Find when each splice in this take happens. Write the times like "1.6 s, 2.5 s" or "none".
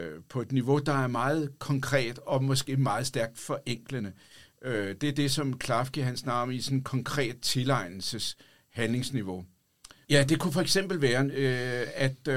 10.0 s